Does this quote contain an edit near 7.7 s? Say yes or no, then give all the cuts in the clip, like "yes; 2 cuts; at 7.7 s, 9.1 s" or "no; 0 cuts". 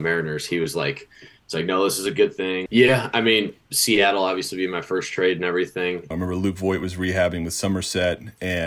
no; 2 cuts; at 2.7 s, 6.1 s